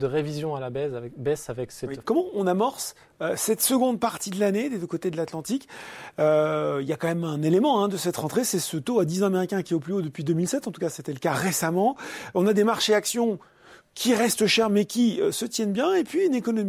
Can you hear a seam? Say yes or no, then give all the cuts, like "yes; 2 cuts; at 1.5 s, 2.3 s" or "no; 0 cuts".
yes; 1 cut; at 2.0 s